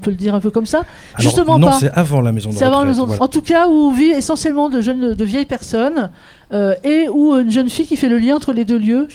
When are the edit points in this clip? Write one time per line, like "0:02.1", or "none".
0:03.2

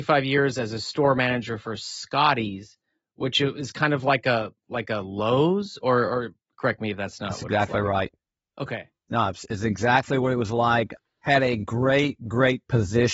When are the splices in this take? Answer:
none

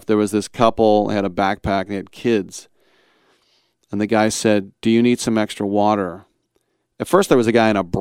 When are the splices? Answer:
none

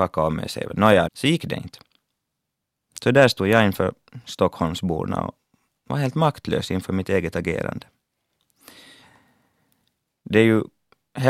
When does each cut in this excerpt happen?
0:01.1

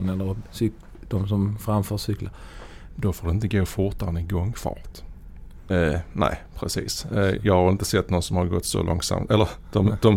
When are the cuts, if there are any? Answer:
0:02.9
0:05.7

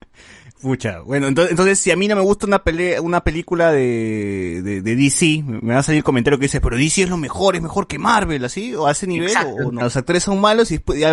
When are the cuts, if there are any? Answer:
0:09.8

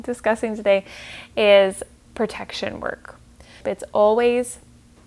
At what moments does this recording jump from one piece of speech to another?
0:03.6

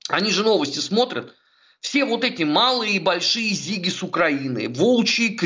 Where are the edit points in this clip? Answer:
none

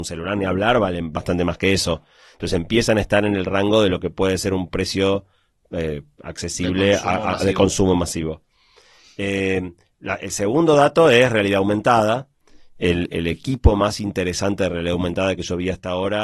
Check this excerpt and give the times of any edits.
none

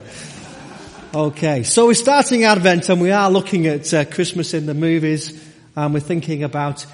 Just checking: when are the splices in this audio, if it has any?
none

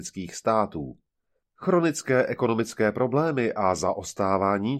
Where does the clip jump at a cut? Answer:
0:01.4

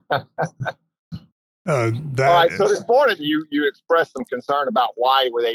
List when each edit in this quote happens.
0:03.2

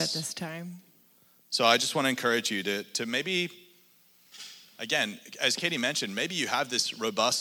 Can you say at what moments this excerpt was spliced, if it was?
none

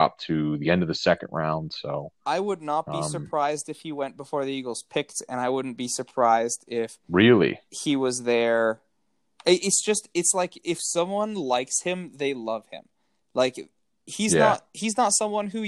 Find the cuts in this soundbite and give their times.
none

